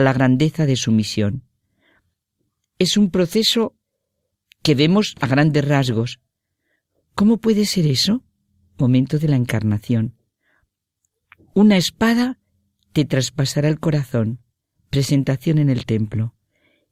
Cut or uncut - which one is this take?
uncut